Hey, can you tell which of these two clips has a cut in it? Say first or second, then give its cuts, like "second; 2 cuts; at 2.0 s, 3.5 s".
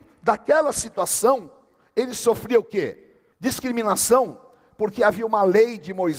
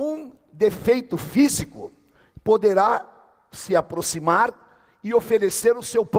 first; 1 cut; at 3.3 s